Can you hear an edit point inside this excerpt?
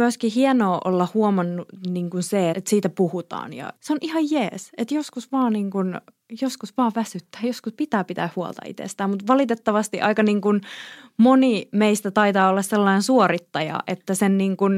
yes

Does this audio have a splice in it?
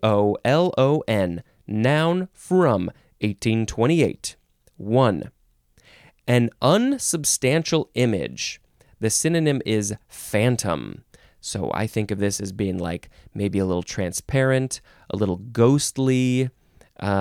no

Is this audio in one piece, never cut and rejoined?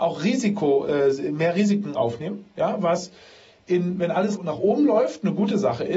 no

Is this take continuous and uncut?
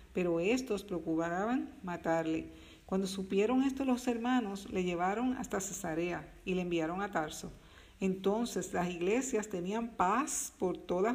yes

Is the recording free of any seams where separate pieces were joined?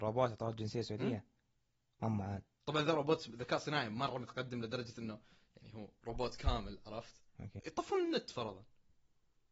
no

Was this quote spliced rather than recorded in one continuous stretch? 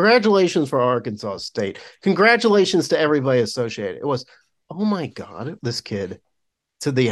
yes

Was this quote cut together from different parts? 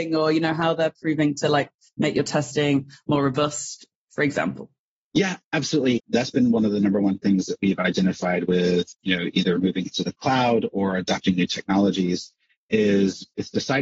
yes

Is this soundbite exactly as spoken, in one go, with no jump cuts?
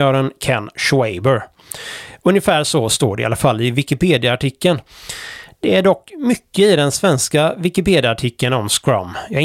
yes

